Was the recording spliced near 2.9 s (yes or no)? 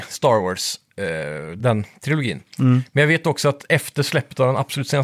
no